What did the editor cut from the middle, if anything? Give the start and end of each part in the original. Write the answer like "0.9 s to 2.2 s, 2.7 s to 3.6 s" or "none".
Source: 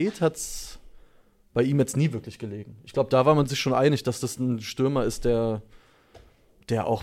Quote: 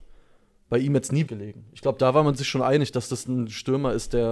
2.1 s to 2.4 s